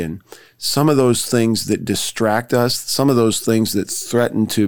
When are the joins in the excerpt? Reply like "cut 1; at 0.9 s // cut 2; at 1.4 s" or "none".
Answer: none